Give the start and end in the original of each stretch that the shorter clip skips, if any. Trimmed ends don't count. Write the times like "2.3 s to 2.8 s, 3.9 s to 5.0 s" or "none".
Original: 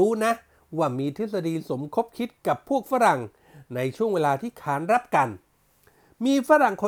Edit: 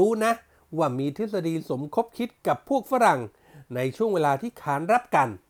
none